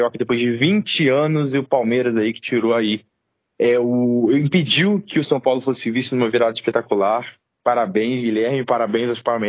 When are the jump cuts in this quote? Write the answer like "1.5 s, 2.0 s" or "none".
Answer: none